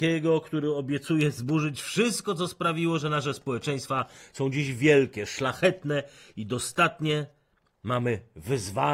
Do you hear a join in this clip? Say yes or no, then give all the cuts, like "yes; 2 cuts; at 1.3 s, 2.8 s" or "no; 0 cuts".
no; 0 cuts